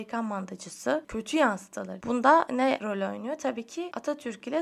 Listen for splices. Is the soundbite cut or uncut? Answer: cut